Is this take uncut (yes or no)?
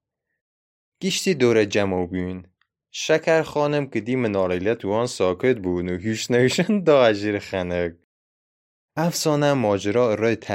yes